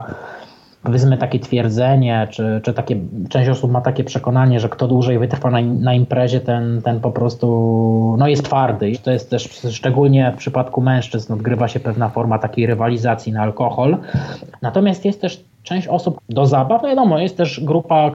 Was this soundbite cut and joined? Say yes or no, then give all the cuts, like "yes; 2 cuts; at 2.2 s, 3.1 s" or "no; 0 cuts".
yes; 3 cuts; at 8.9 s, 14.5 s, 16.2 s